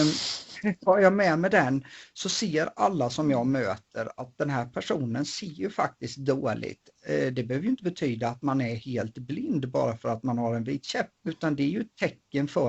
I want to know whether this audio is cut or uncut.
cut